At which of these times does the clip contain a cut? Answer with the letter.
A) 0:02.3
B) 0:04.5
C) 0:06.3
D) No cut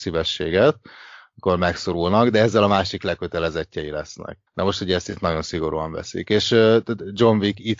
B